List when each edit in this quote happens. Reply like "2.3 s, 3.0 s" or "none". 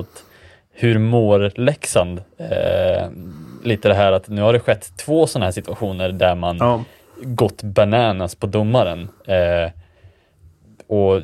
none